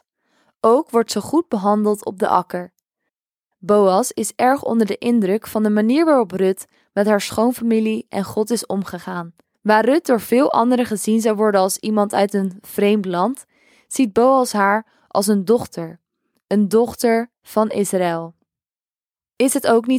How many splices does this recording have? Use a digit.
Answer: 1